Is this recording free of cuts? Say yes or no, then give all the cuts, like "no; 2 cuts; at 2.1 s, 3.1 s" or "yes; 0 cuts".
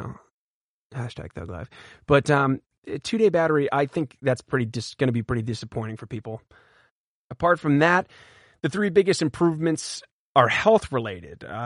yes; 0 cuts